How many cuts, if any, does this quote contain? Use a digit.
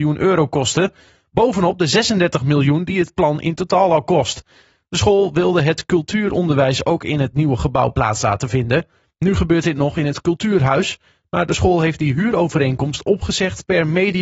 0